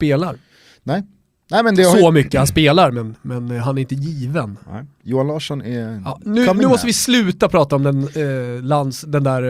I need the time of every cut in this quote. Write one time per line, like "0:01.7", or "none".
none